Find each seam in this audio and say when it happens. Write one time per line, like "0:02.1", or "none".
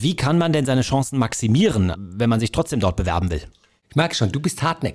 0:01.9

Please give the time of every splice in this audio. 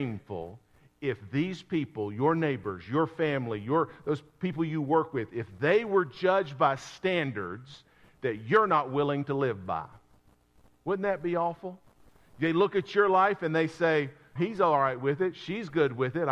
0:14.4

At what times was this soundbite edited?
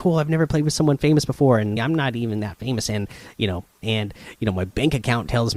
0:01.8
0:03.8

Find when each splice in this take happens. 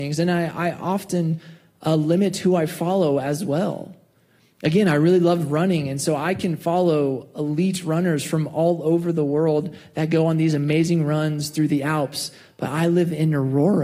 none

